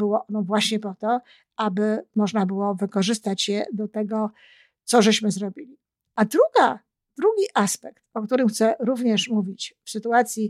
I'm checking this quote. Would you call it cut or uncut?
uncut